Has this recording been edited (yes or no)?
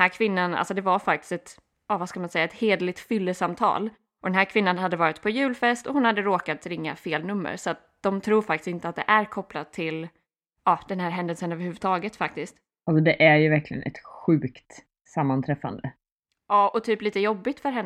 no